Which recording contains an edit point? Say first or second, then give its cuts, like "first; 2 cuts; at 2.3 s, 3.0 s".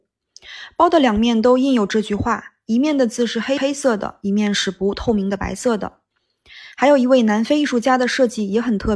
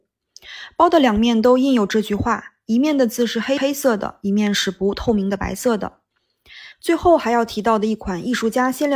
second; 1 cut; at 6.7 s